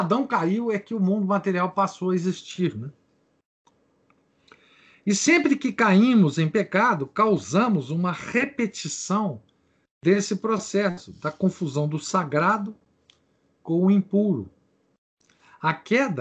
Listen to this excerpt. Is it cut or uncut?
uncut